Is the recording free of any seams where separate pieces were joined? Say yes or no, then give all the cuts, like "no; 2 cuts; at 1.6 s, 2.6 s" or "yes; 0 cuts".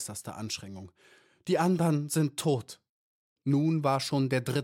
no; 1 cut; at 3.4 s